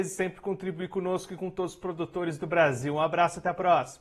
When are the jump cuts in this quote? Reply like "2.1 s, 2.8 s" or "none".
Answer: none